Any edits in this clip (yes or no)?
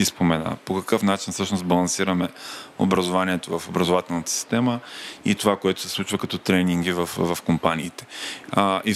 no